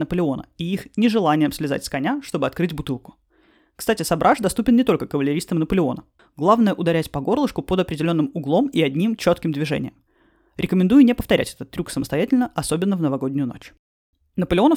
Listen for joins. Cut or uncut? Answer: cut